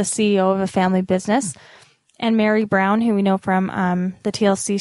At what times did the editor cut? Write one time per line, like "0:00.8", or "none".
none